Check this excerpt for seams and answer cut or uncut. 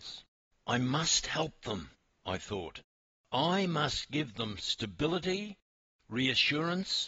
uncut